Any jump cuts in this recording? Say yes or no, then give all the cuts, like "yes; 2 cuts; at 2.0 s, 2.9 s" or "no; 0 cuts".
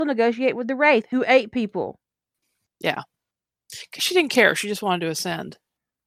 no; 0 cuts